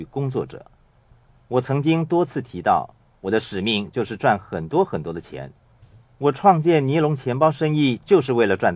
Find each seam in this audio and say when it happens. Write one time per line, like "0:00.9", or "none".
0:03.1